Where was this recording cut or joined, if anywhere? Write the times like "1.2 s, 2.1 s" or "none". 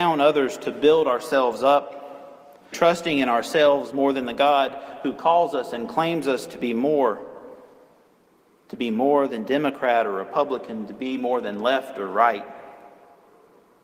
2.7 s